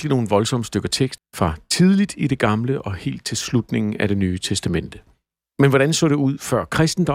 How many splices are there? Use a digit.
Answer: 1